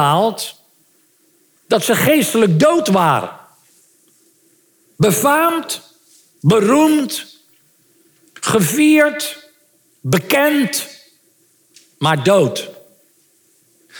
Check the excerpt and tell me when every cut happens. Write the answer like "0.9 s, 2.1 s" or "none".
none